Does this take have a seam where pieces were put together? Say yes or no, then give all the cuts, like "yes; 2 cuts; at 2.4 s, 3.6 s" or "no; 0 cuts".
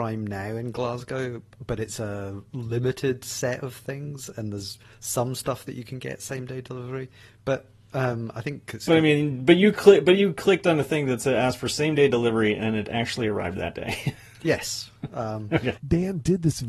yes; 1 cut; at 15.8 s